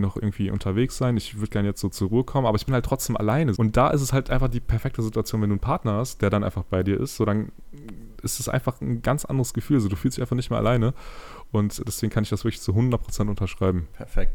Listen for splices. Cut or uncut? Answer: cut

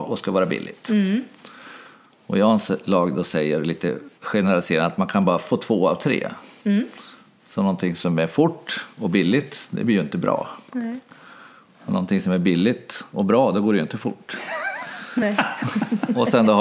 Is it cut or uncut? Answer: uncut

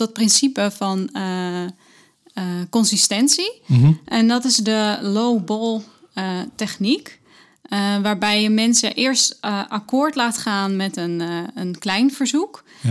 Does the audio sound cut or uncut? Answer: uncut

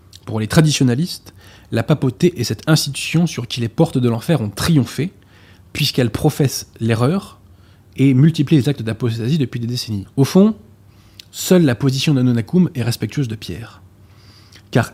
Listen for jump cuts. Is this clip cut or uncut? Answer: cut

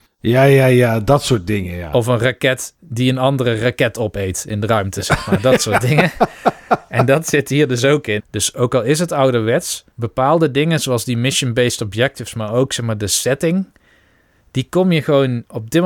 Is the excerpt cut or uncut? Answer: cut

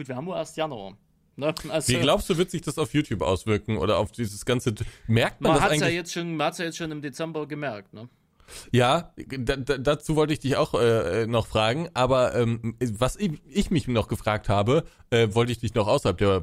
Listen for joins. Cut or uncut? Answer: uncut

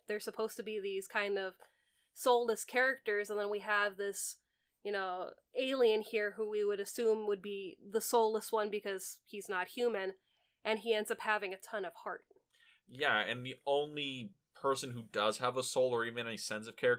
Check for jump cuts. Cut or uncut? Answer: uncut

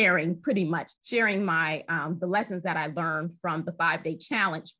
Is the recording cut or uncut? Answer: cut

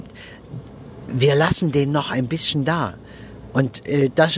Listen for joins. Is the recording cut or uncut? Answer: uncut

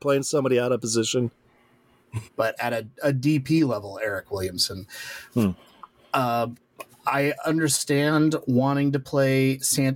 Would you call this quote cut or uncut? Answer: cut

